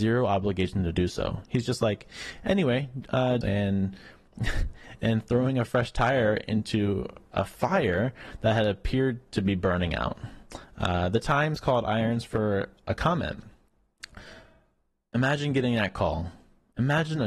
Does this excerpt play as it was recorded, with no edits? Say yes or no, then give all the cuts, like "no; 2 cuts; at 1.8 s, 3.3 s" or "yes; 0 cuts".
no; 1 cut; at 3.4 s